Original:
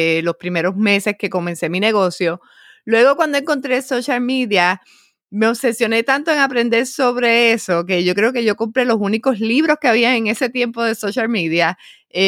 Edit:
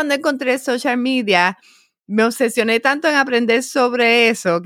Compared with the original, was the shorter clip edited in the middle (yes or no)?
no